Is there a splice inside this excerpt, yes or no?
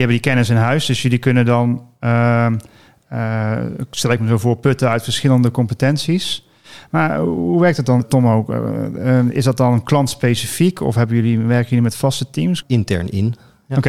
yes